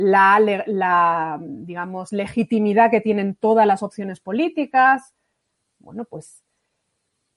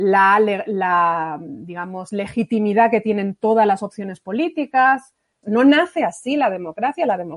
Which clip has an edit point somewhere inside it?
second; 1 cut; at 5.4 s

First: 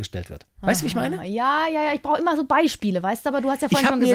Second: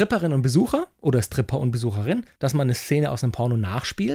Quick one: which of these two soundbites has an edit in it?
second; 1 cut; at 2.4 s

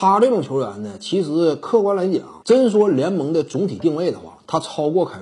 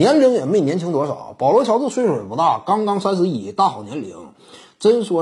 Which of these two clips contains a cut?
first; 1 cut; at 2.4 s

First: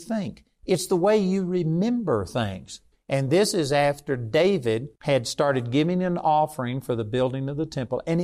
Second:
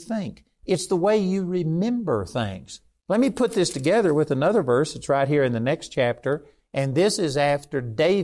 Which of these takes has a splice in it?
first; 2 cuts; at 2.9 s, 5.0 s

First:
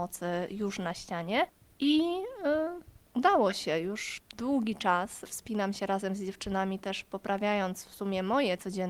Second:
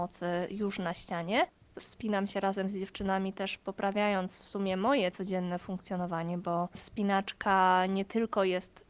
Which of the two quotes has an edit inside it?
second; 1 cut; at 1.7 s

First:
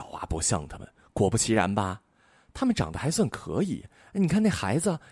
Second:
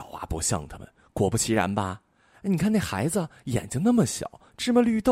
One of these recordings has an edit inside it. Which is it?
second; 1 cut; at 2.3 s

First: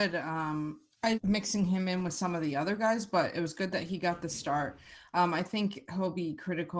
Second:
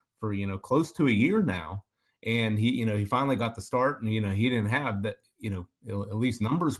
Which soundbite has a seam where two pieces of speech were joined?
first; 1 cut; at 1.1 s

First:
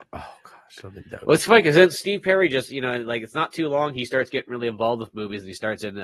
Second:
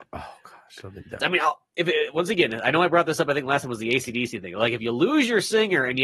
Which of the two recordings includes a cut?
second; 1 cut; at 1.2 s

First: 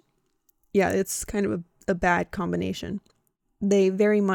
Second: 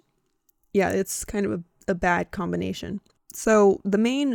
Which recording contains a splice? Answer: second; 1 cut; at 3.2 s

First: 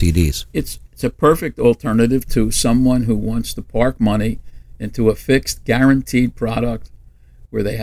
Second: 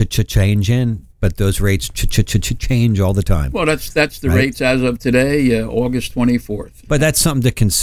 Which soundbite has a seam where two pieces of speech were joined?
second; 1 cut; at 6.8 s

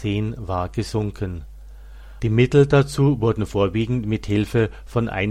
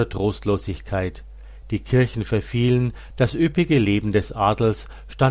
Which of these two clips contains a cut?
first; 1 cut; at 2.2 s

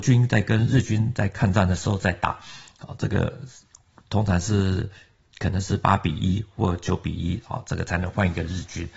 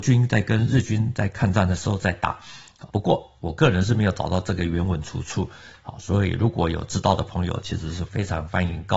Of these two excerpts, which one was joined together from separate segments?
second; 2 cuts; at 2.9 s, 8.1 s

